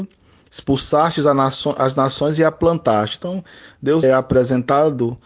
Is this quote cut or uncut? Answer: cut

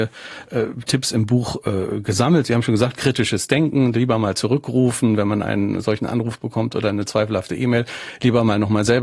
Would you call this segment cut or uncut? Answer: uncut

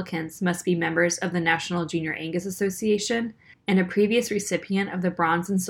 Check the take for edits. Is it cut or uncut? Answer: cut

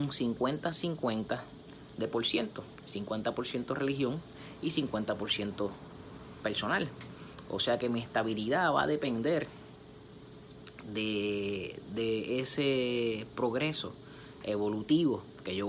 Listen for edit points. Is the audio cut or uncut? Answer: uncut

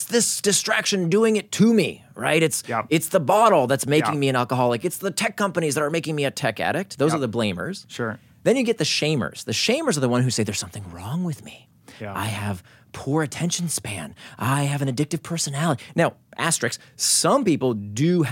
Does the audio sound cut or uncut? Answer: uncut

